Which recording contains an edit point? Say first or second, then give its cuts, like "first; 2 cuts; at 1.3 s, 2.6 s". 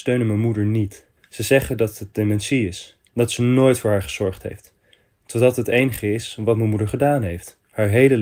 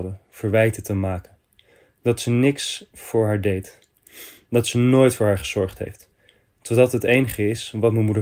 first; 2 cuts; at 1.2 s, 3.1 s